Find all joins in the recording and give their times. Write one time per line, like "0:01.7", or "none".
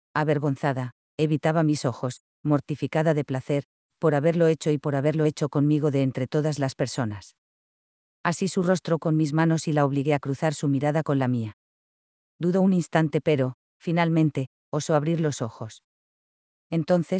none